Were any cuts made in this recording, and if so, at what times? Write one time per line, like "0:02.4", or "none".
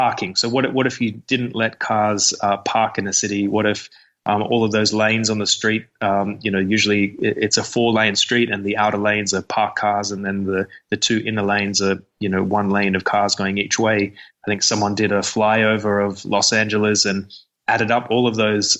0:14.3